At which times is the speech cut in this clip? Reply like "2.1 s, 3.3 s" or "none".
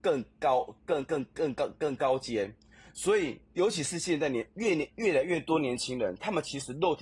3.4 s